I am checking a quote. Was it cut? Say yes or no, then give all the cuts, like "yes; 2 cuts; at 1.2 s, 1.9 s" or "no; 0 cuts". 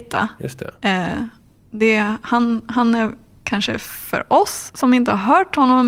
no; 0 cuts